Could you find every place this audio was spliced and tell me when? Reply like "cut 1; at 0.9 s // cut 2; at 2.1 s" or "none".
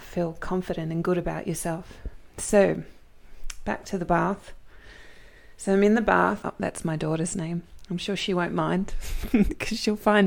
cut 1; at 6.4 s